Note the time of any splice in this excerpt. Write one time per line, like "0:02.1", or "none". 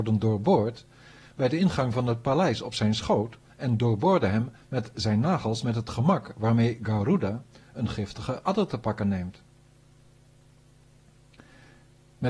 0:03.5